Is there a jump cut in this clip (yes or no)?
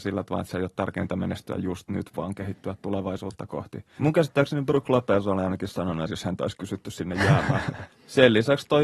yes